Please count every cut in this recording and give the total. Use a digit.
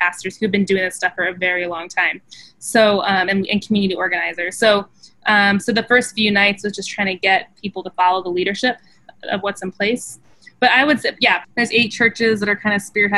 1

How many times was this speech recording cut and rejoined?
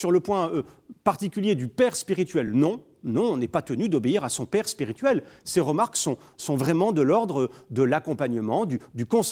0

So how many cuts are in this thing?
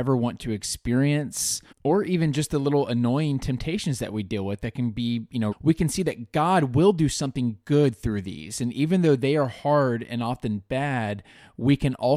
2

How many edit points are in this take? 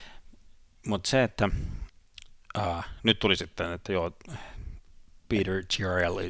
0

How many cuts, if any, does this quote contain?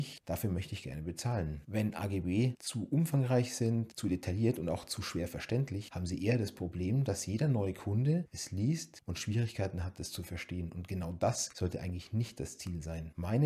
0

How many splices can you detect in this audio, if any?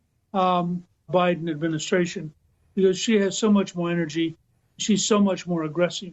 1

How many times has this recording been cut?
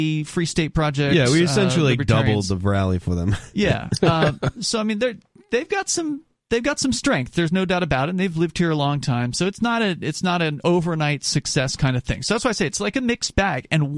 0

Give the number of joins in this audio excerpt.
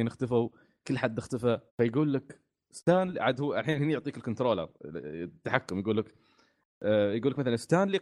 2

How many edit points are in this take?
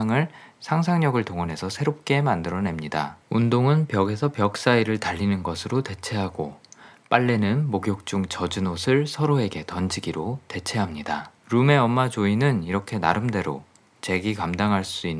2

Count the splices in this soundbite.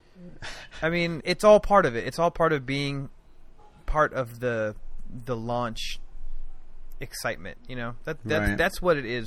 1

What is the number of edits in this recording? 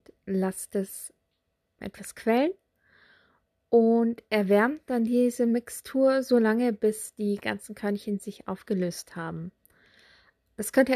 1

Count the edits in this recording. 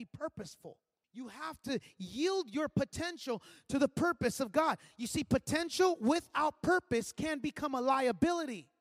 1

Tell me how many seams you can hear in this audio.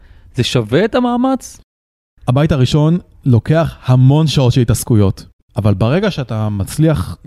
1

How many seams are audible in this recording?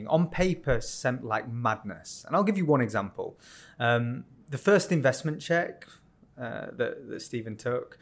0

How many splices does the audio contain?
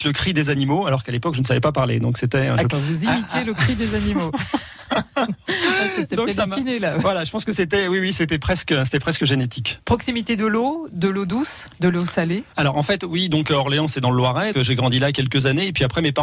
2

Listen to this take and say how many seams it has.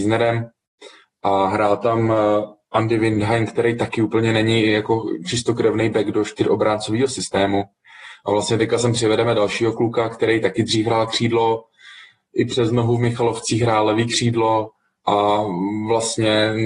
1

